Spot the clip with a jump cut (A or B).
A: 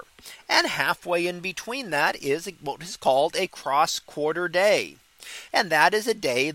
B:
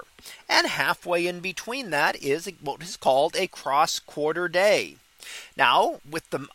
A